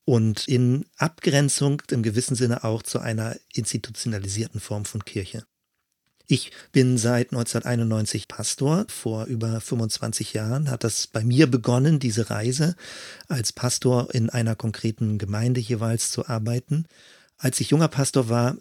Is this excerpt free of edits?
no; 1 cut; at 8.9 s

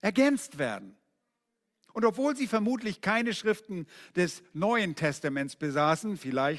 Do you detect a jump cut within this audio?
no; 0 cuts

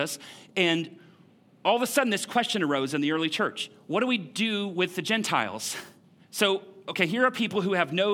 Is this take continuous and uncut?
no; 1 cut; at 6.2 s

